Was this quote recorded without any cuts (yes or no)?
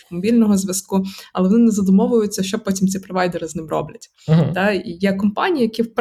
yes